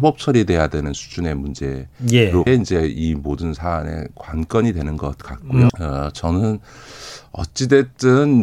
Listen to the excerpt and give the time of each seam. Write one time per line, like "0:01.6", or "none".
0:02.5
0:05.7